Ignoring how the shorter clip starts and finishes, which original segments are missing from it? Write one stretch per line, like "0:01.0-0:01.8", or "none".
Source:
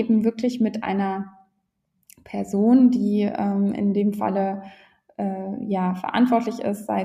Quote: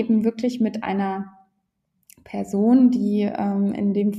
none